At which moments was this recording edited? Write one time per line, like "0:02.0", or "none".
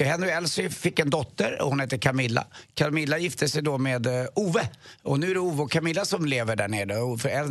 none